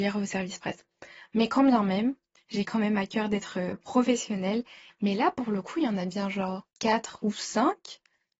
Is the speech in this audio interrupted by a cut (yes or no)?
yes